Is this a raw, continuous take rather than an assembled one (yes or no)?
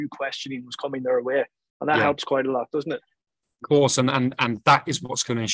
yes